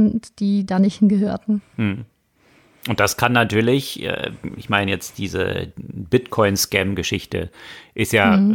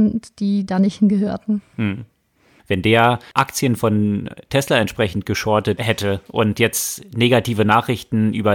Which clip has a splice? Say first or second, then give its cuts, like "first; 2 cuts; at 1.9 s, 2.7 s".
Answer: second; 1 cut; at 2.6 s